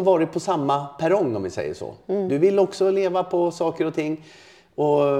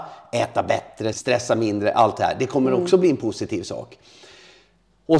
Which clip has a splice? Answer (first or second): second